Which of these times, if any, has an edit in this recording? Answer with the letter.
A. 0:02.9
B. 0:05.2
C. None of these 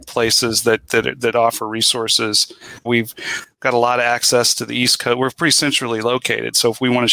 A